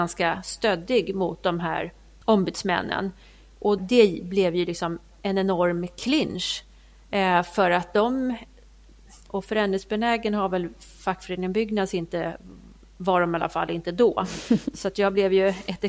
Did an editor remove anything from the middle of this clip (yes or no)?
yes